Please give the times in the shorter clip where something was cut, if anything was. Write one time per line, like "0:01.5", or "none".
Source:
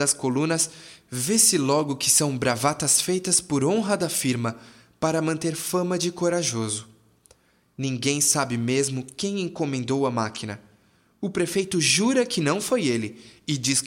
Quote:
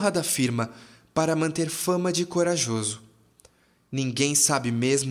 none

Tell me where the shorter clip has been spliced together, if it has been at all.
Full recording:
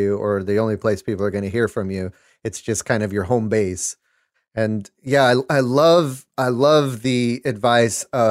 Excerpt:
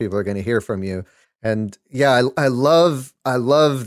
0:01.2

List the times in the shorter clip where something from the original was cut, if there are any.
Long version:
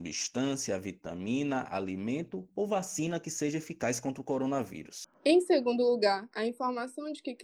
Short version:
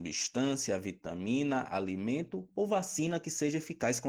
none

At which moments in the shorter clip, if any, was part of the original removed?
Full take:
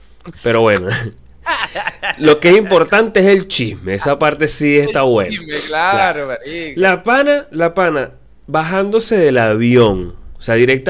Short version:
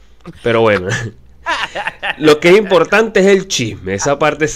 none

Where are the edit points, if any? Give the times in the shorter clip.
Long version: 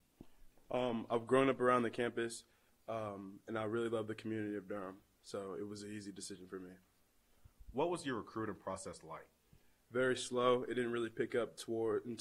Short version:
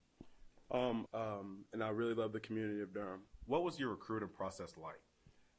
0:01.1
0:03.3

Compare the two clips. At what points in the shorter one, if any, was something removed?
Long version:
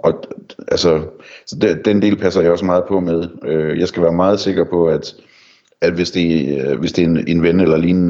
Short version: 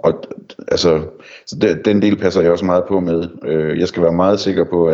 none

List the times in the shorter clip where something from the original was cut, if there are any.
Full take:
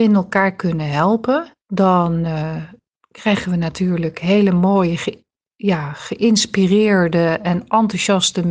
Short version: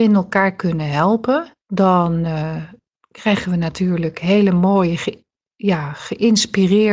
none

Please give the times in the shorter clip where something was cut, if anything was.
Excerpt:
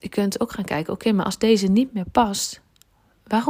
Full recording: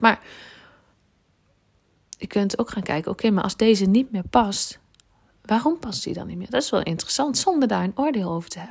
none

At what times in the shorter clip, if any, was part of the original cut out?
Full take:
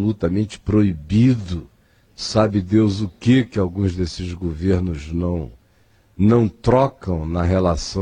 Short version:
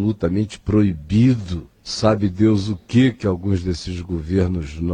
0:01.7

